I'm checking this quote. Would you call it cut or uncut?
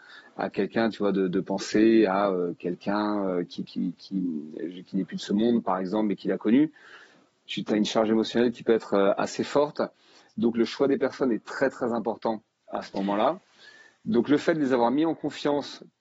uncut